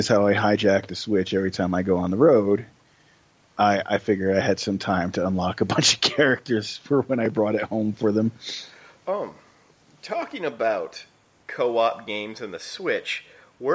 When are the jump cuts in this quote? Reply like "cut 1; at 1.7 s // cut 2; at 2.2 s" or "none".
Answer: none